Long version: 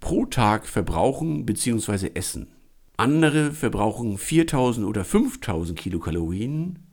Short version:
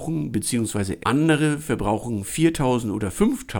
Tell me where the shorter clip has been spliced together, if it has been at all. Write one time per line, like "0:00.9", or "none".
0:01.0